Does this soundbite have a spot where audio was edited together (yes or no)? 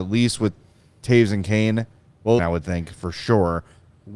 yes